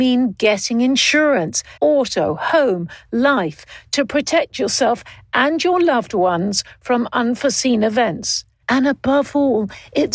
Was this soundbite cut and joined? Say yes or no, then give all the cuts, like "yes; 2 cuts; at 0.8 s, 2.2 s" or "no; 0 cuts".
yes; 2 cuts; at 1.8 s, 8.6 s